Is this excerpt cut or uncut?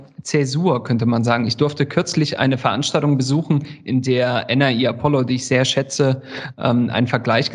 uncut